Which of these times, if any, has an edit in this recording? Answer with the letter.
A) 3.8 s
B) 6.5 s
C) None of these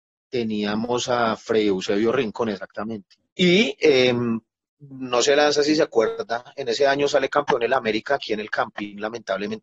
C